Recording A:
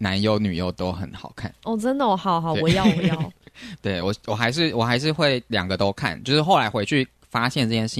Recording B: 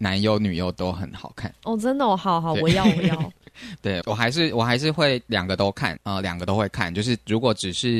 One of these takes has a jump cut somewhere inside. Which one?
B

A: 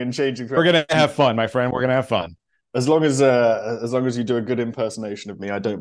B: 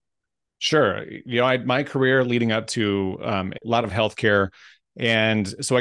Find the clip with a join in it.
B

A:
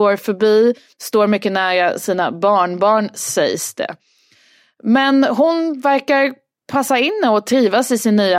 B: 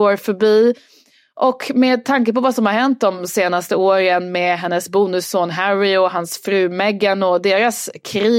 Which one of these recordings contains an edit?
A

